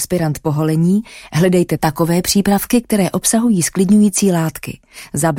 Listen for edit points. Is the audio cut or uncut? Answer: uncut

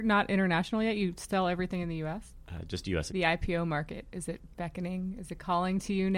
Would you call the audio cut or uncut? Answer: cut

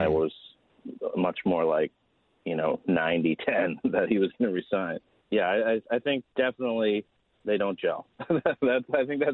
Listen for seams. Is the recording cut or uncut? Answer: uncut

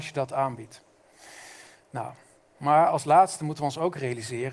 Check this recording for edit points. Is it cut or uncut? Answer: uncut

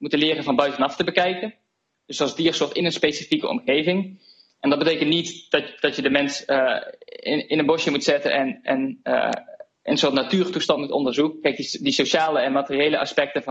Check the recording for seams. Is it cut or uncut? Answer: uncut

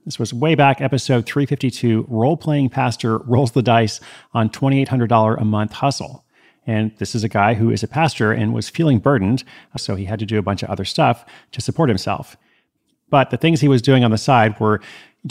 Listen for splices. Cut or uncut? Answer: cut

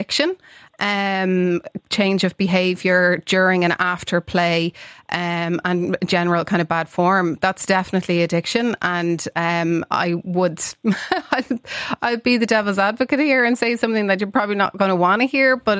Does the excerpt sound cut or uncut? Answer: cut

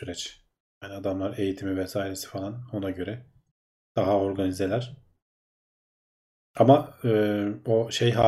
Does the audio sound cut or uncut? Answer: uncut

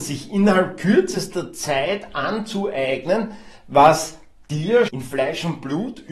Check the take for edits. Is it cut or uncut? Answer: cut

